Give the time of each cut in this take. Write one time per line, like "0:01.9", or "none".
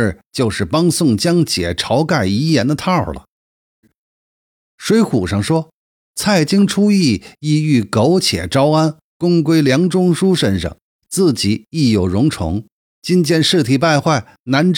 0:03.8